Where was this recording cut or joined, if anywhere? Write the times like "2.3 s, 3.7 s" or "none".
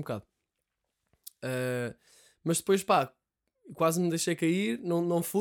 none